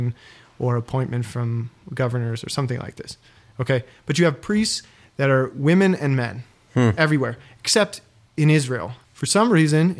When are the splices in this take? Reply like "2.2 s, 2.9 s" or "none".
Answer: 9.0 s